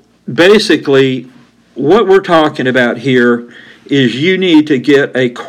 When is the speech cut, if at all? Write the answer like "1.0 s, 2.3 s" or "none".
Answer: none